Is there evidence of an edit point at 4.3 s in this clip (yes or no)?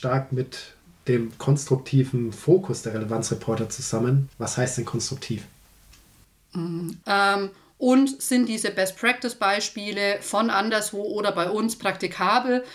yes